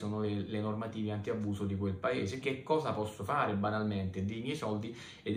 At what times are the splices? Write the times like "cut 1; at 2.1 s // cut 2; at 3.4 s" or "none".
cut 1; at 2.4 s